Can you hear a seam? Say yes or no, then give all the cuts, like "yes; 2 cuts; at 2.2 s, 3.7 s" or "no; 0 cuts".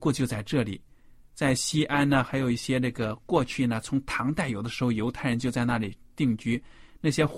no; 0 cuts